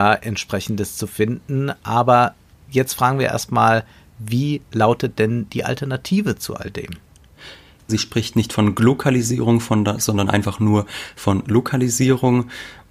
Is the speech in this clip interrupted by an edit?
yes; 1 cut; at 7.9 s

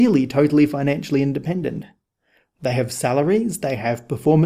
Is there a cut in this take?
no; 0 cuts

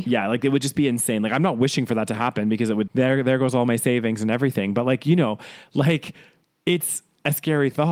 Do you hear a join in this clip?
yes; 1 cut; at 2.9 s

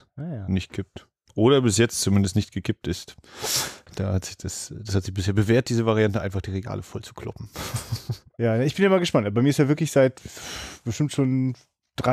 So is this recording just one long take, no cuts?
yes; 0 cuts

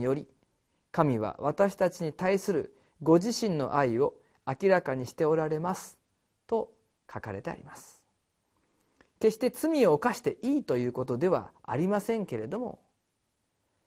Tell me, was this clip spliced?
no; 0 cuts

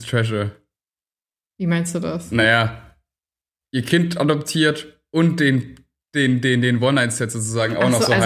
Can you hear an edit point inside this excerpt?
no; 0 cuts

